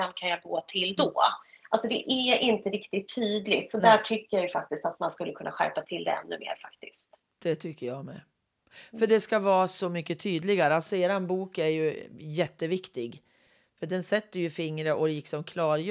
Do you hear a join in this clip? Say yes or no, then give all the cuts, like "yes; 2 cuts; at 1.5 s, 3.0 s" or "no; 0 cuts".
no; 0 cuts